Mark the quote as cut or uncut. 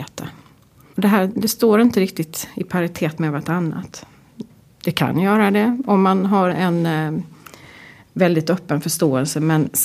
cut